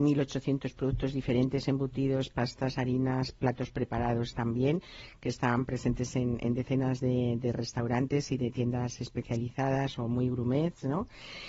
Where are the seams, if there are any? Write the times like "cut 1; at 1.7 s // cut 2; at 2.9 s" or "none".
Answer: none